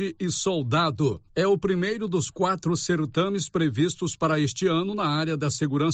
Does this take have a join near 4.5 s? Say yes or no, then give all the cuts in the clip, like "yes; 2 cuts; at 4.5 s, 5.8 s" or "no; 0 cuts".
no; 1 cut; at 1.3 s